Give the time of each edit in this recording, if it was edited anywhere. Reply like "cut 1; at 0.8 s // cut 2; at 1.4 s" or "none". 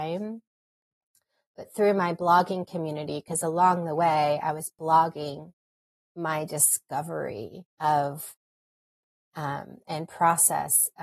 cut 1; at 7.7 s